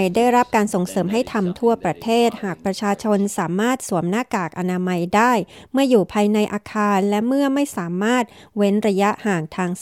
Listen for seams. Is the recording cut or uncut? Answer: uncut